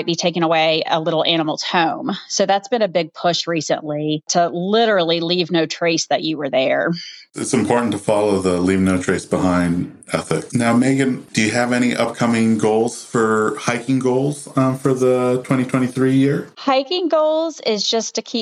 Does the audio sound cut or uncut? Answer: cut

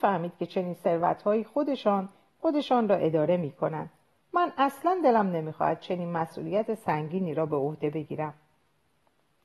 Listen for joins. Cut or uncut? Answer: cut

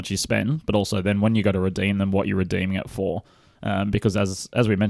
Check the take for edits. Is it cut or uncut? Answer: uncut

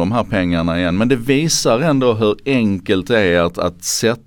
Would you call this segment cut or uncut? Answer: uncut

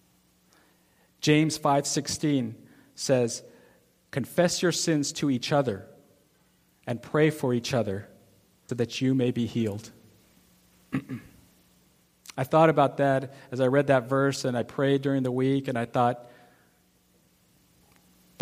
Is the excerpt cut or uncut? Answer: cut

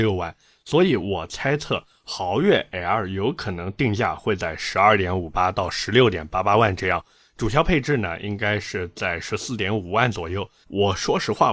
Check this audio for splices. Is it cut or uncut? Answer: cut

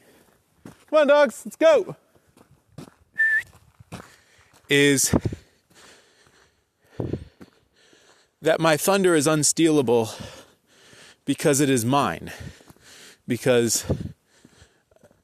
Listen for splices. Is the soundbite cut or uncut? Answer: uncut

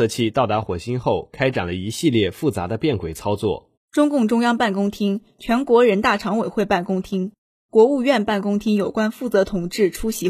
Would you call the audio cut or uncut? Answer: cut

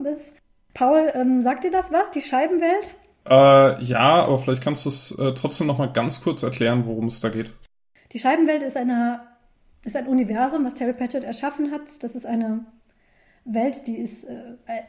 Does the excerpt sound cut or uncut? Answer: uncut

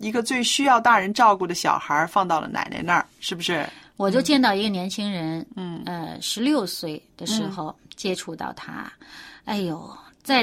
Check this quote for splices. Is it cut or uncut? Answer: uncut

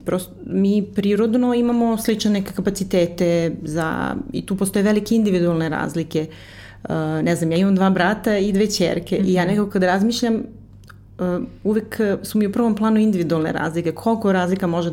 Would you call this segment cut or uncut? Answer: uncut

